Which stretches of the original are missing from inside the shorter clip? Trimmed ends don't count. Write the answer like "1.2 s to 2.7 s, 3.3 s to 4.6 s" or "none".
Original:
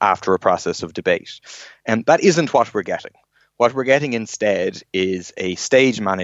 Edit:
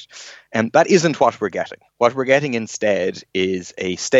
3.2 s to 3.5 s